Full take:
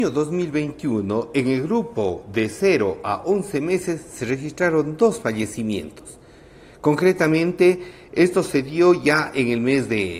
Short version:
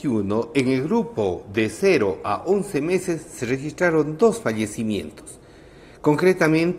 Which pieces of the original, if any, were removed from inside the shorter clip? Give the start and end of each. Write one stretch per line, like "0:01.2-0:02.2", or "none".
none